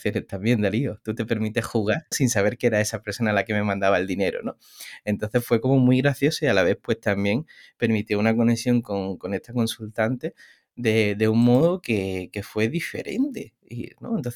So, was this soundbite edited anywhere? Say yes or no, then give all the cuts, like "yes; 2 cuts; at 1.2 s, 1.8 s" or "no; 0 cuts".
yes; 1 cut; at 2.1 s